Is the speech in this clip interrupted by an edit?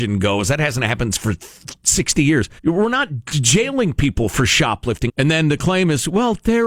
yes; 2 cuts; at 2.6 s, 5.1 s

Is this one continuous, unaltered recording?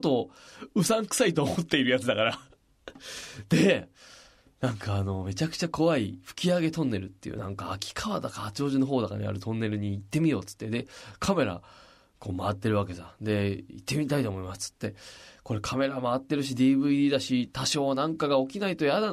yes; 0 cuts

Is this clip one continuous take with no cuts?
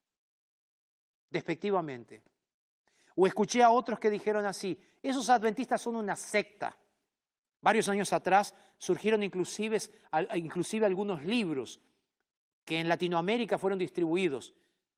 yes; 0 cuts

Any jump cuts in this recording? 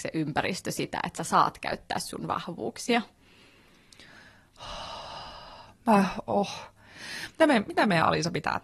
yes; 1 cut; at 7.3 s

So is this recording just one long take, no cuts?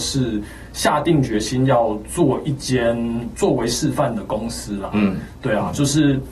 yes; 0 cuts

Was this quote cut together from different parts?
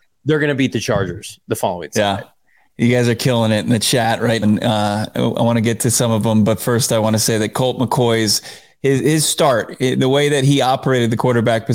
yes; 1 cut; at 4.4 s

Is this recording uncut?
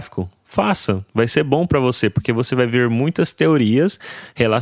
yes; 0 cuts

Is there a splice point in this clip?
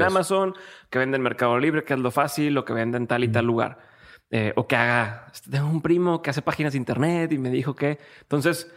no; 0 cuts

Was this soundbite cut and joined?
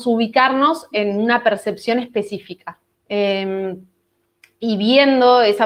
yes; 1 cut; at 2.9 s

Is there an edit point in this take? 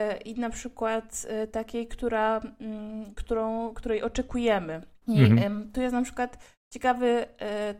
yes; 1 cut; at 5.0 s

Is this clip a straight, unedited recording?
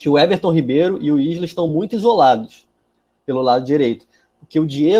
yes; 0 cuts

